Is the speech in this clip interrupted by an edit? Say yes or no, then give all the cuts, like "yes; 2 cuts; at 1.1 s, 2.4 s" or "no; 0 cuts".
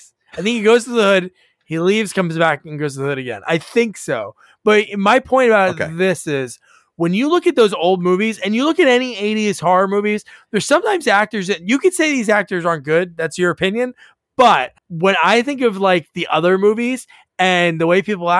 yes; 1 cut; at 14.8 s